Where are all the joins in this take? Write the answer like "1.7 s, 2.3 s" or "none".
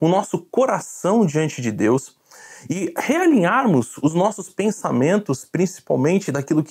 none